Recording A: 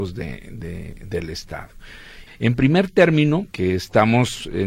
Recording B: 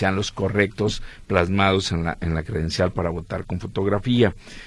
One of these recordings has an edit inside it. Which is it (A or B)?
A